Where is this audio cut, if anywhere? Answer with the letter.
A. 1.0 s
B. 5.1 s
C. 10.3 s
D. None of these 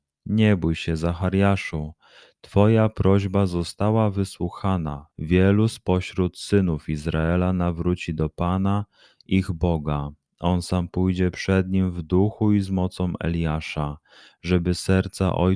B